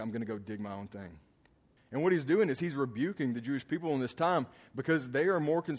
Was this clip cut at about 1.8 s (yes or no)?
yes